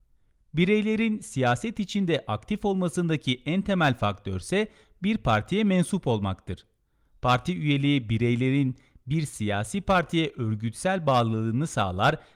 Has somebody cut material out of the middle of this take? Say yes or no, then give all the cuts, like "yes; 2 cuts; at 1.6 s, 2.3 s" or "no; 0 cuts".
no; 0 cuts